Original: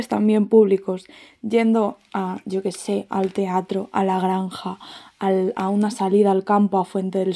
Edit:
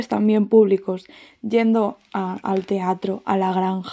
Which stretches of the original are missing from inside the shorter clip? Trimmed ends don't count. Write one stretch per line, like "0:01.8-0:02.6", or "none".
0:02.4-0:03.1